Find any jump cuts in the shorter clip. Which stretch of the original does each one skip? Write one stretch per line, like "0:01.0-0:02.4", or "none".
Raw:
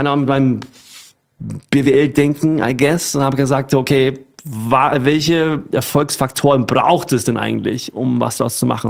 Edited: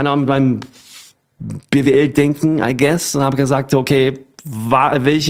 none